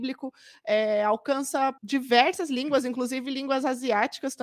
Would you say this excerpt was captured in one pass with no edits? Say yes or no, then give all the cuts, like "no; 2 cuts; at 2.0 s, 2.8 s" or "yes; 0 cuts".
no; 1 cut; at 1.8 s